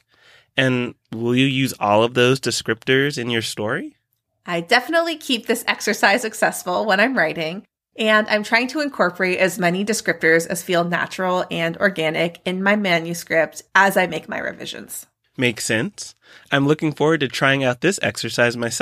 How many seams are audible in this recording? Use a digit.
0